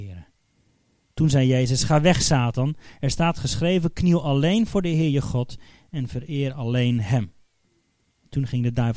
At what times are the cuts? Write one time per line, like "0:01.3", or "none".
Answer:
none